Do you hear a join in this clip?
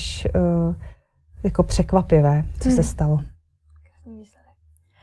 no; 0 cuts

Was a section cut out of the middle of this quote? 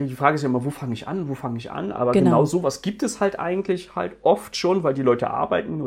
no; 0 cuts

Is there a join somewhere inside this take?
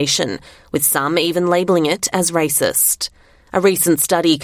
no; 0 cuts

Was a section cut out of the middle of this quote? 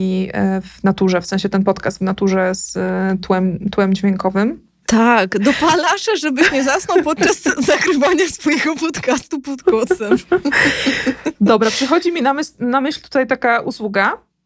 yes; 1 cut; at 4.8 s

